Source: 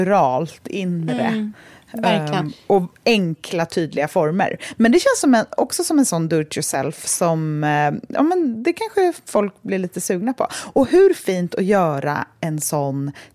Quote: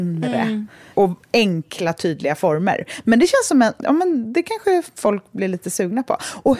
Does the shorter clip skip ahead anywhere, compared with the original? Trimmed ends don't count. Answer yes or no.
yes